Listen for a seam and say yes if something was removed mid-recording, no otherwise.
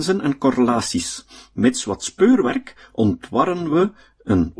no